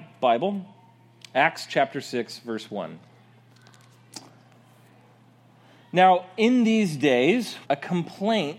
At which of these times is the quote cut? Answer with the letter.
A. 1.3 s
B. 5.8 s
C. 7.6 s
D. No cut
C